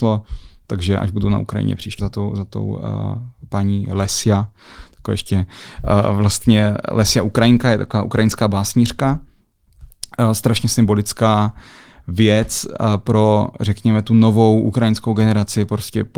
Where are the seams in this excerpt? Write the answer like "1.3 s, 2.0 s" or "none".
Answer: 2.0 s